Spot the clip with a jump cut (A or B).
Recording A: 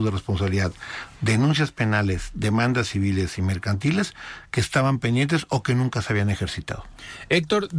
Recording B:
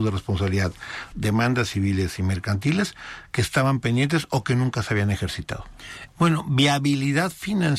B